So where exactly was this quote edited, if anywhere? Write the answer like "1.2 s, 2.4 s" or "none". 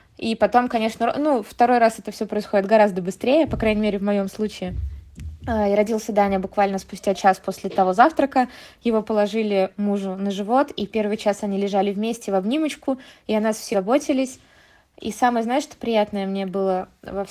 13.7 s